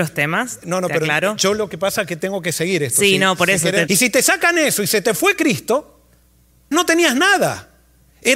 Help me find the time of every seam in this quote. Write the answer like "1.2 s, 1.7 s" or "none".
3.9 s, 6.7 s